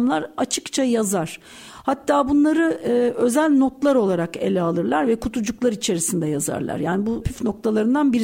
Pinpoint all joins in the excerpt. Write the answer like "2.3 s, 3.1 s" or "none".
7.2 s